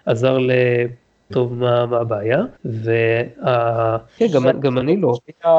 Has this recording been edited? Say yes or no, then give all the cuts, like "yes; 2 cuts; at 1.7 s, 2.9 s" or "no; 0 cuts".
yes; 3 cuts; at 1.3 s, 2.6 s, 4.2 s